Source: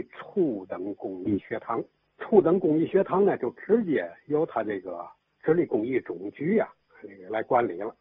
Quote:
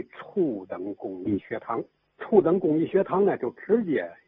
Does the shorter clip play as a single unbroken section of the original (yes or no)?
yes